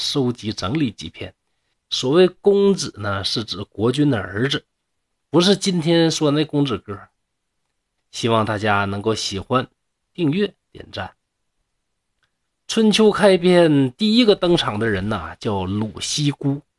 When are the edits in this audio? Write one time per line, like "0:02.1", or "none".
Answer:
0:01.7
0:08.0